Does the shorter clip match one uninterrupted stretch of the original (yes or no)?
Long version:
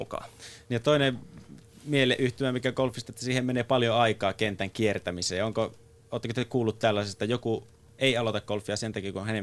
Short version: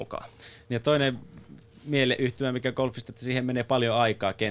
yes